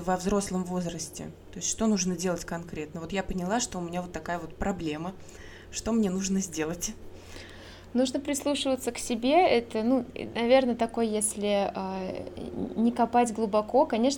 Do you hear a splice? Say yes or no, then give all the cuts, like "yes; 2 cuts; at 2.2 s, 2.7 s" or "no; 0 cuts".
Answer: no; 0 cuts